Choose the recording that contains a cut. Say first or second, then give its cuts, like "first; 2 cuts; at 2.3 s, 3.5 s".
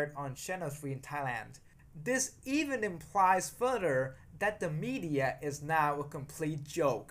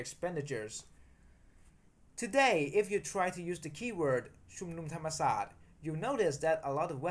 first; 1 cut; at 1.8 s